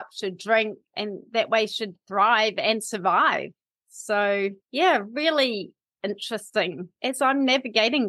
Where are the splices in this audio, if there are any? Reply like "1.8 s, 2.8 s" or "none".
4.6 s